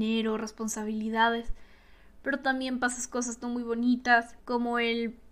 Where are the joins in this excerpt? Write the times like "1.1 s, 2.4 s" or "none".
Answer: 4.4 s